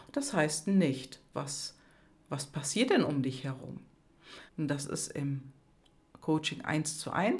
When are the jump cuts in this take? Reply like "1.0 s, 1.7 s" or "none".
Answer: 1.3 s, 4.5 s